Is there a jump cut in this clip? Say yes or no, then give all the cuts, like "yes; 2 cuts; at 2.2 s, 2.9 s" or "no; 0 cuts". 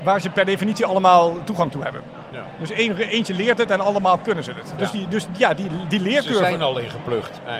no; 0 cuts